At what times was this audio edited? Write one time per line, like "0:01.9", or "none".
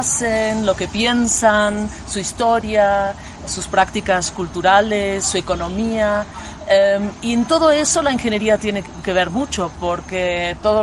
0:03.5